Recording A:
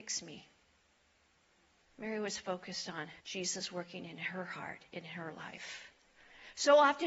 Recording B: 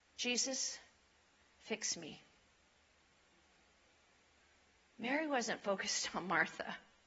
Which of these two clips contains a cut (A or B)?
A